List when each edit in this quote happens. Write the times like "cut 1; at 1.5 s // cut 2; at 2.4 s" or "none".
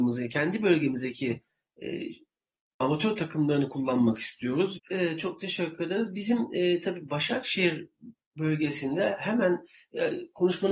cut 1; at 2.8 s // cut 2; at 4.8 s